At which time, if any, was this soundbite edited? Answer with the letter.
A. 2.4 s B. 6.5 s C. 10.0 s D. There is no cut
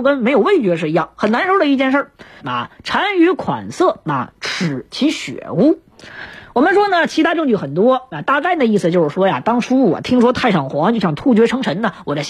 A